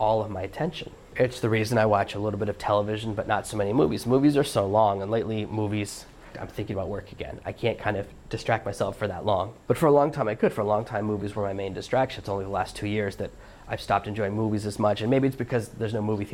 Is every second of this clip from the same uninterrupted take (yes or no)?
no